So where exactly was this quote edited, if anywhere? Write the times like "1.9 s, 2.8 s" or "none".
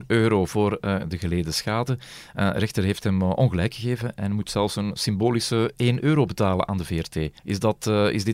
7.4 s